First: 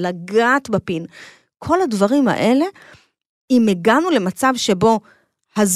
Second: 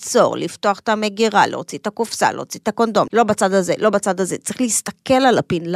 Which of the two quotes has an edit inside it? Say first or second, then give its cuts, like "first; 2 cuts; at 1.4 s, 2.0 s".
second; 1 cut; at 3.1 s